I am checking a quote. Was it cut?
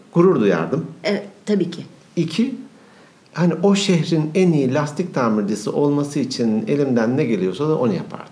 no; 0 cuts

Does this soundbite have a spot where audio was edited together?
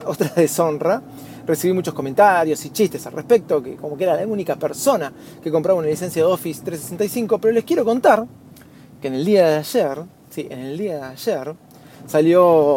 no; 0 cuts

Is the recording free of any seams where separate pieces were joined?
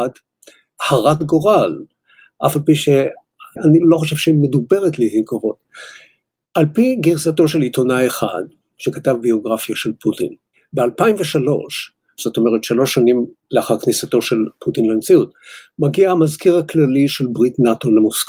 yes; 0 cuts

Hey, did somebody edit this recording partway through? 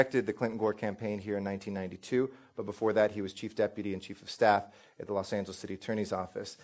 no; 0 cuts

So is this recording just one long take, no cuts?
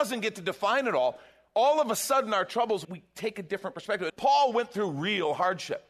no; 2 cuts; at 2.8 s, 4.1 s

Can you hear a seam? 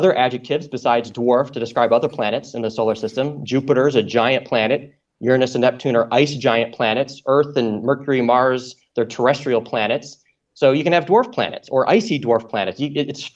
no; 0 cuts

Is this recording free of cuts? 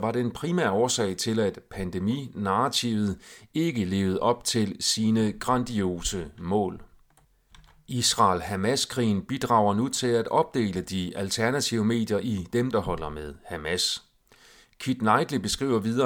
no; 1 cut; at 12.7 s

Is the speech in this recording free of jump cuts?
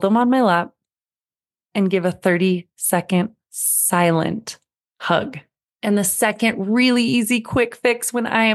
no; 1 cut; at 5.7 s

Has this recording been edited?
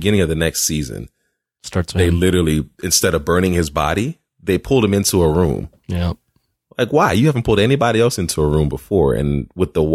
no; 0 cuts

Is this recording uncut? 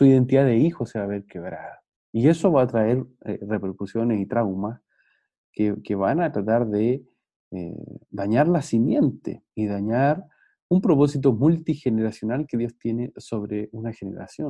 yes; 0 cuts

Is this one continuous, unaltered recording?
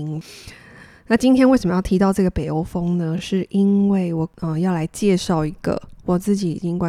yes; 0 cuts

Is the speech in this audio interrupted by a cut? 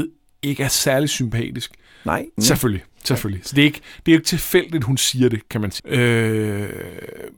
yes; 2 cuts; at 2.4 s, 5.8 s

